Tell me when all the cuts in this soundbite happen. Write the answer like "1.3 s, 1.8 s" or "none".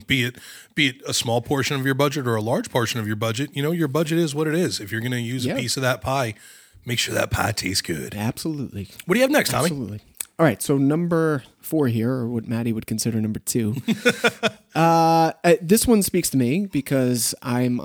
none